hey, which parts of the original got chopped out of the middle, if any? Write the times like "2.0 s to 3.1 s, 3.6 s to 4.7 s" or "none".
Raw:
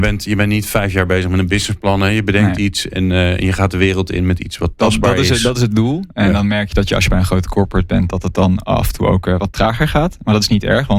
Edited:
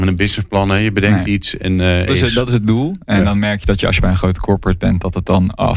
3.4 s to 5.1 s

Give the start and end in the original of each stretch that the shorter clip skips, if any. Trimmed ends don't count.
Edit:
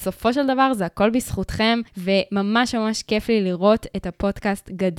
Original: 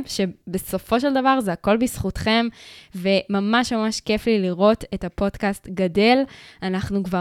2.5 s to 2.9 s

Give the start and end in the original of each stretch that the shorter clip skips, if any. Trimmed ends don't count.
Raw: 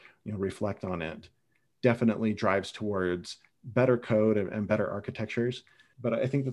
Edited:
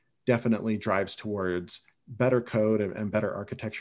none

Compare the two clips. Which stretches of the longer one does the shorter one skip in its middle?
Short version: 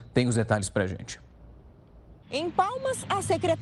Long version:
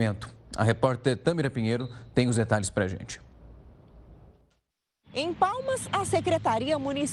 4.2 s to 5.1 s

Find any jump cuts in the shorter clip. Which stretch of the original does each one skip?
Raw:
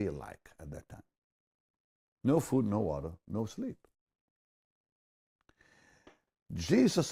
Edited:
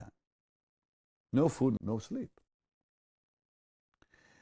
2.7 s to 3.2 s

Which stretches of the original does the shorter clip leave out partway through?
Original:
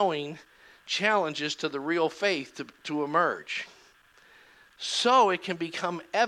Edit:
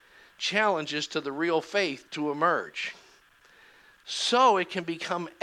2.5 s to 2.8 s

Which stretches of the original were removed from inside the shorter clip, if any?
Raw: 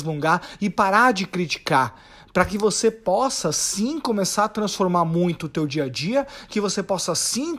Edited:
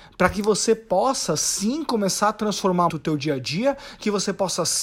5.0 s to 5.4 s

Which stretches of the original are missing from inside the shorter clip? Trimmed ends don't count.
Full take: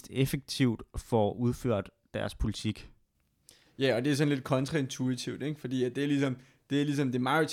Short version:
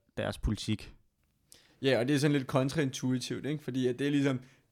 none

